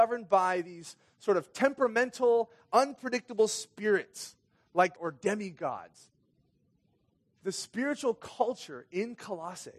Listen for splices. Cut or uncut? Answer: cut